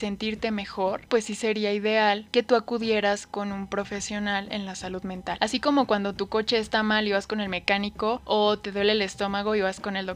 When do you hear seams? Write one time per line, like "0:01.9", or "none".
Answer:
0:01.1